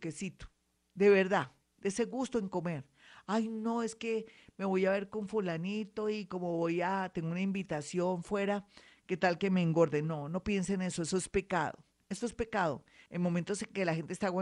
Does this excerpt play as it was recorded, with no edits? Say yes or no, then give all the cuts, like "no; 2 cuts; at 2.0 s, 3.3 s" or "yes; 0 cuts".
yes; 0 cuts